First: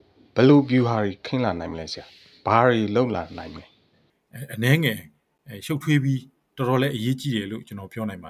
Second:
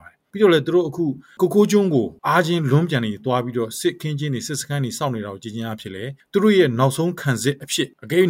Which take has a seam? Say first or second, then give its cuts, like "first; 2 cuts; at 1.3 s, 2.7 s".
second; 1 cut; at 2.2 s